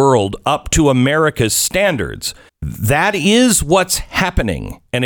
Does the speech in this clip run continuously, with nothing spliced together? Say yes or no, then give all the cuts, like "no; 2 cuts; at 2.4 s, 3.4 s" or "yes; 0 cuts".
no; 1 cut; at 2.5 s